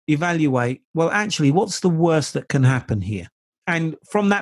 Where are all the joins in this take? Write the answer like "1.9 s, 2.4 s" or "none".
3.5 s